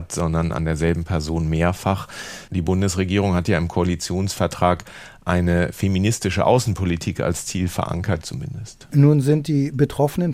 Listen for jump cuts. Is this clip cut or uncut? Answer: cut